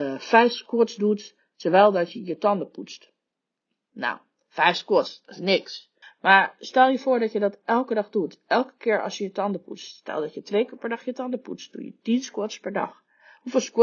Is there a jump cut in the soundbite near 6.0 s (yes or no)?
yes